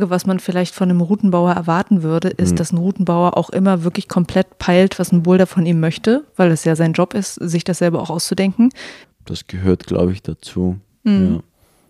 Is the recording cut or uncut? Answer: cut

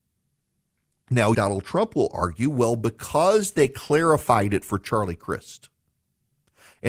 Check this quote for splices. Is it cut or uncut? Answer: cut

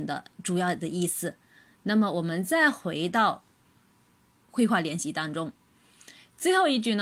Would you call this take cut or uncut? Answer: uncut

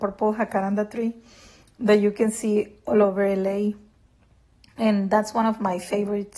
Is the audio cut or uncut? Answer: uncut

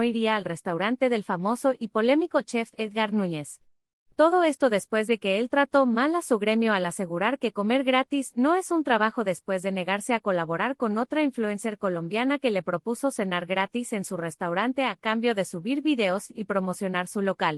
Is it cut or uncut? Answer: uncut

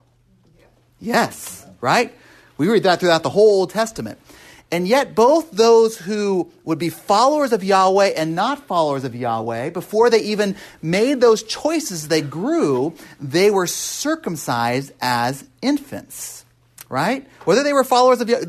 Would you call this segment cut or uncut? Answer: uncut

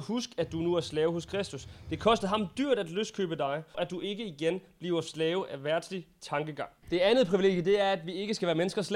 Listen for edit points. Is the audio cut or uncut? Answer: cut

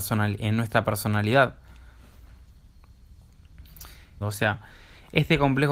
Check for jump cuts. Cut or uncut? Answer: cut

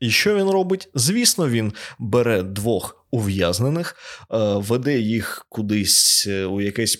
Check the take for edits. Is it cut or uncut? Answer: uncut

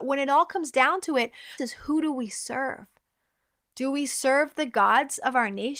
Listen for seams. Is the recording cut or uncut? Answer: cut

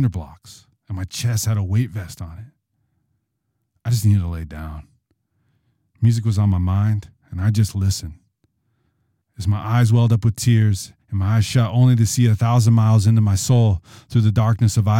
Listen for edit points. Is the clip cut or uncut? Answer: cut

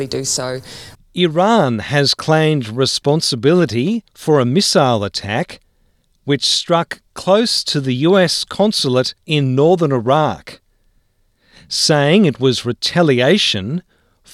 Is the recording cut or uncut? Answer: cut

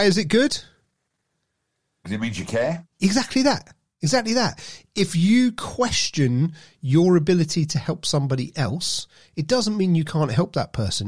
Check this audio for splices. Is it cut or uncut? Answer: uncut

